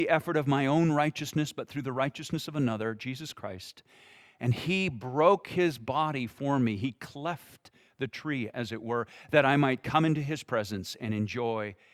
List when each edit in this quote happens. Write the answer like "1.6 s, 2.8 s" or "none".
none